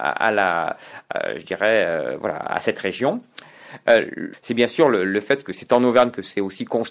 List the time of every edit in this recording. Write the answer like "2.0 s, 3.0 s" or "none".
none